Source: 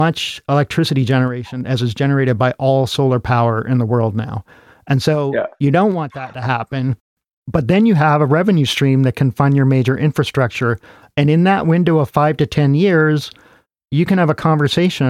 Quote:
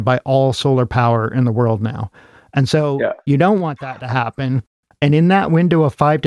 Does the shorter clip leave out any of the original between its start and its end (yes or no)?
yes